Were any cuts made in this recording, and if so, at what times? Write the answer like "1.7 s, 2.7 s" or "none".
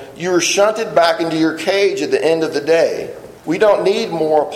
3.4 s